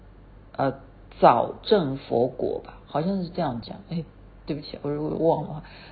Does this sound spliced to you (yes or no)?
no